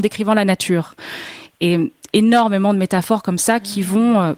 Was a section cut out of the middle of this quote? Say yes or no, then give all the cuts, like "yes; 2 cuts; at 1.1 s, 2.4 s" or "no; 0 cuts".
no; 0 cuts